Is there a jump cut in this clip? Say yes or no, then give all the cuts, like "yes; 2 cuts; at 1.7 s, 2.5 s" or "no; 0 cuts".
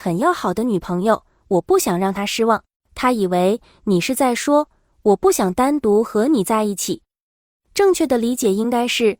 yes; 1 cut; at 2.8 s